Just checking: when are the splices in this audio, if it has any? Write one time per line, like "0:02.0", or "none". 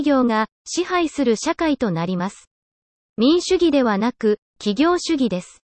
0:03.4